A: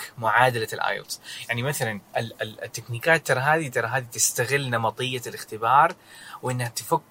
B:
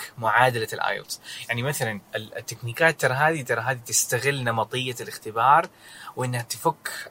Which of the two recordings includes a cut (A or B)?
B